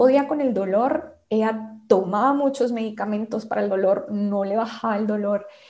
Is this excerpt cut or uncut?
uncut